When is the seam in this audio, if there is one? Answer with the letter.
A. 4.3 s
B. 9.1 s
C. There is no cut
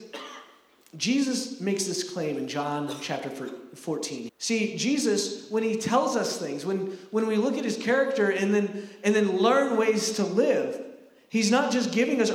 A